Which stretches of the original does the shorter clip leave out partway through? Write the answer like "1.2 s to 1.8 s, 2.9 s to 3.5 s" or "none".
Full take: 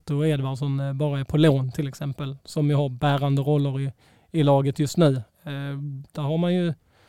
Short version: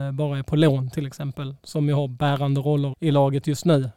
3.7 s to 4.2 s